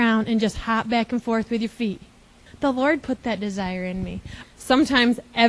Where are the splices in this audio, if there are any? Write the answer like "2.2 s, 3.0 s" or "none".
2.5 s, 4.4 s